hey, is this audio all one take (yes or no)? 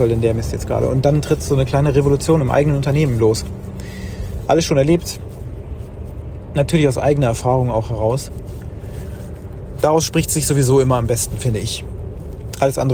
yes